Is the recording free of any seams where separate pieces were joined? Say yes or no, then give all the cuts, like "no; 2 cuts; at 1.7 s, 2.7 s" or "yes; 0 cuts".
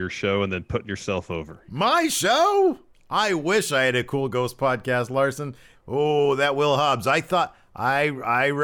no; 2 cuts; at 2.9 s, 5.7 s